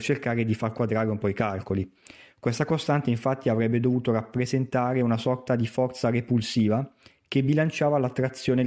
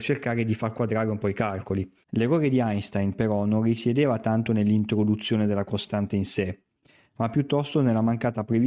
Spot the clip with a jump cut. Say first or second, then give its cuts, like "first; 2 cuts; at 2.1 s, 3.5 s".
second; 1 cut; at 2.0 s